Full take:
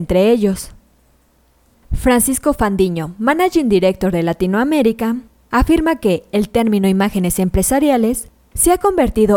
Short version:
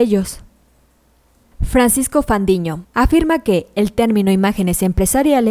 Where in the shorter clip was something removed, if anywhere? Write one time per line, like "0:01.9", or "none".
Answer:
0:02.8

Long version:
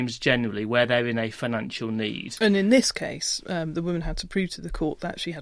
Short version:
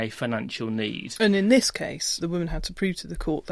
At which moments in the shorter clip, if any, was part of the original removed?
0:02.2

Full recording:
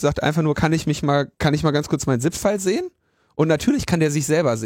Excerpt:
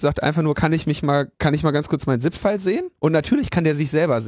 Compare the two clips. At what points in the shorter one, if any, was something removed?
0:03.0

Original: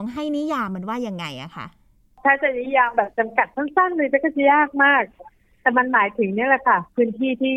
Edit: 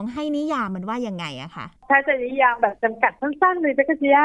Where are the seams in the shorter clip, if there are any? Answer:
0:01.8

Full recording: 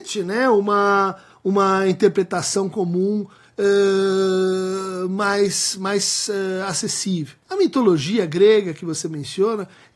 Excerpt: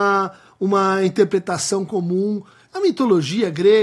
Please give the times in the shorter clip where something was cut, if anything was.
0:02.7

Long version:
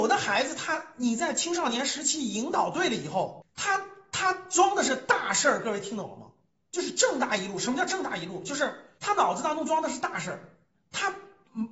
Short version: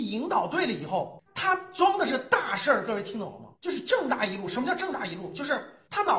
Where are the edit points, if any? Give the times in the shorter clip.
0:01.3
0:03.5

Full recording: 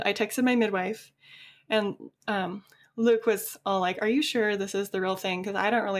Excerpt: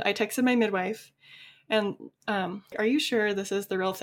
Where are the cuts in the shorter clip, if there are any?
0:02.7

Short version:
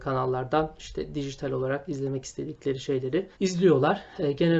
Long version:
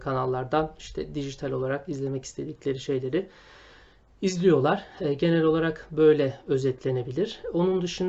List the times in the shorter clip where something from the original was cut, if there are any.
0:03.3

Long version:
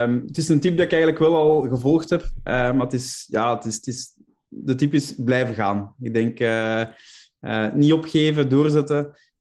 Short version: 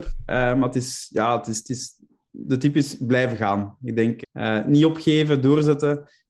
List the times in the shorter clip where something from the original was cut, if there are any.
0:04.2

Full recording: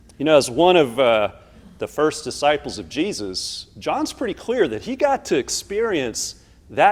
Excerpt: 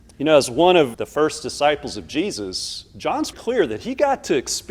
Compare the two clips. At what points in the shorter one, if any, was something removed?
0:00.9
0:03.3

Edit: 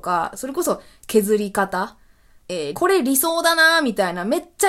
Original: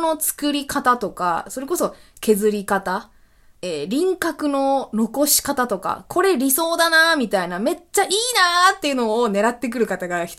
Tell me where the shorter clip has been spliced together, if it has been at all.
0:02.7

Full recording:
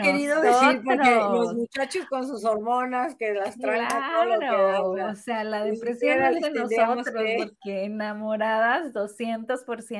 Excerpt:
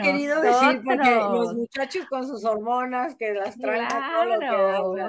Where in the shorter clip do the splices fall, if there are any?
none

